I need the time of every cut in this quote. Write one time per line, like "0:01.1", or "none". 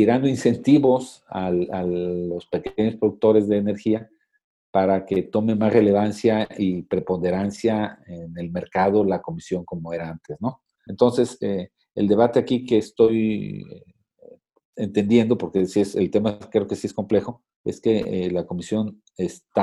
0:10.9
0:17.5